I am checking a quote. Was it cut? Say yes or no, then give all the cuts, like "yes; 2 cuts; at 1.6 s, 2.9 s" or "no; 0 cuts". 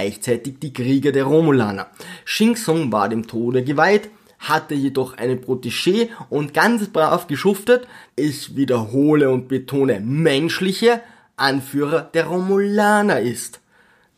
yes; 1 cut; at 8.1 s